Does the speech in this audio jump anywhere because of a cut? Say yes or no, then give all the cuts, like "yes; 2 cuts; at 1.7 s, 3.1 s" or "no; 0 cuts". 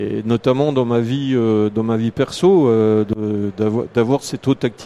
no; 0 cuts